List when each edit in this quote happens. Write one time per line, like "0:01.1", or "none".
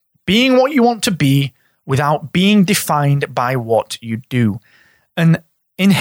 none